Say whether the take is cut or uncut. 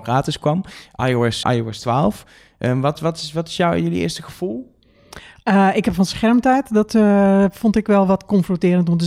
cut